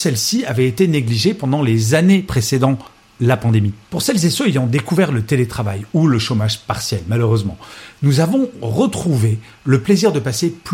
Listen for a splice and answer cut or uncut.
uncut